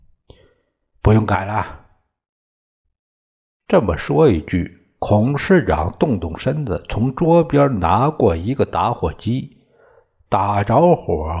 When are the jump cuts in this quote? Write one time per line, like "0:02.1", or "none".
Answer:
none